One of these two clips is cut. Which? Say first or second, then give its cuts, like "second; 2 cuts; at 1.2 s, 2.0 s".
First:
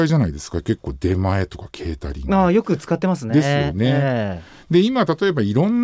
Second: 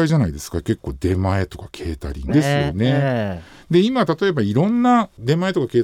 second; 1 cut; at 2.3 s